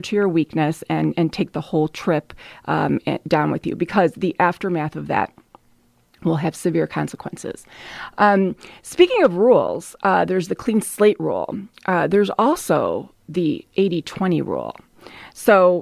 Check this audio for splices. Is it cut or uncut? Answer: uncut